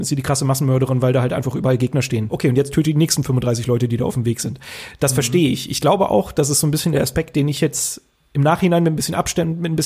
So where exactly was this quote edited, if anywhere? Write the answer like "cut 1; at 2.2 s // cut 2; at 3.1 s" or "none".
cut 1; at 2.3 s